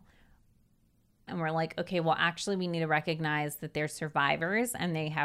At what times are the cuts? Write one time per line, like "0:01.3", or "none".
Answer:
0:01.3

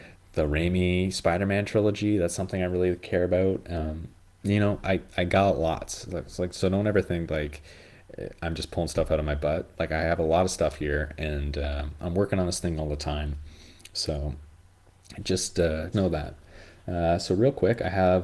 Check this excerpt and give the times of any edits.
0:15.9

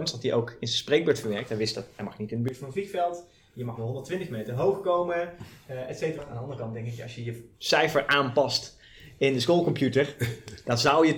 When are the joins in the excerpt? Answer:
0:06.2
0:07.5

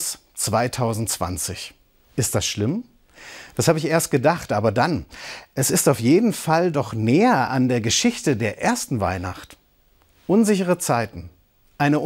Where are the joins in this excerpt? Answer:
none

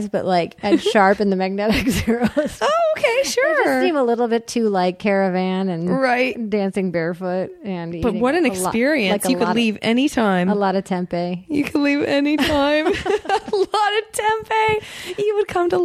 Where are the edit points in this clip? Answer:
none

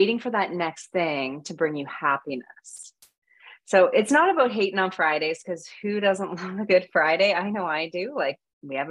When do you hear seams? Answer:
none

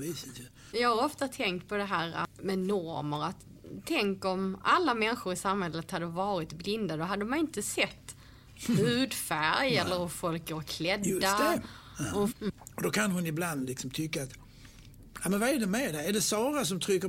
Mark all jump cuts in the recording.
0:12.3

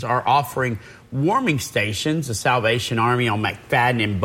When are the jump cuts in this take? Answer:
none

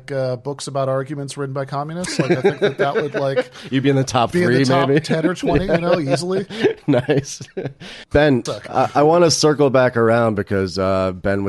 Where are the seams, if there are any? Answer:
0:08.5

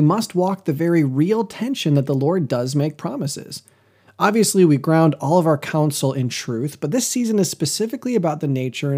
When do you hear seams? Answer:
0:04.1

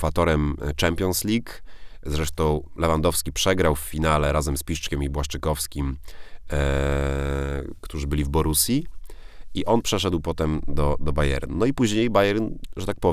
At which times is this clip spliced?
none

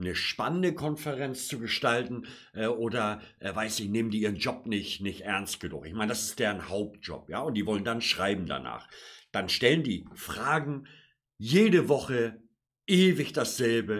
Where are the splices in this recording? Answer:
none

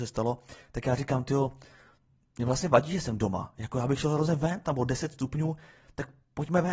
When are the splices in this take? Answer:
0:04.6

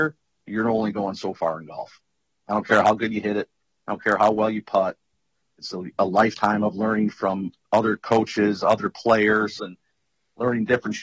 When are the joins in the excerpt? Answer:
0:05.4
0:09.6

